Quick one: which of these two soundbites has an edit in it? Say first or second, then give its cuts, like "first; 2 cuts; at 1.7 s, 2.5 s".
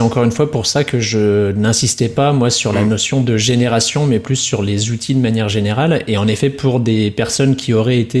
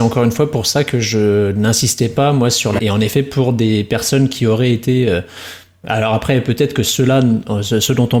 second; 1 cut; at 2.8 s